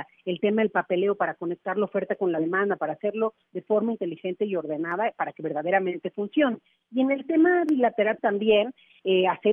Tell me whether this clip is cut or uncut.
cut